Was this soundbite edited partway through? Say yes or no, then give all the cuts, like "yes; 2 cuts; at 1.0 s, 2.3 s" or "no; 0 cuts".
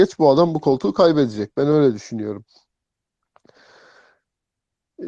no; 0 cuts